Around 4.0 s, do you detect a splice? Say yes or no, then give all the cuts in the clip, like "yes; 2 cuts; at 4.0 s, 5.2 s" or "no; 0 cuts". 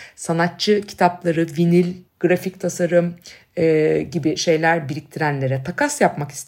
no; 1 cut; at 2.1 s